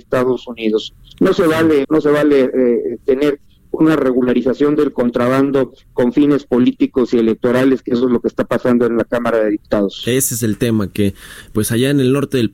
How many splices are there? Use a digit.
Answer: 1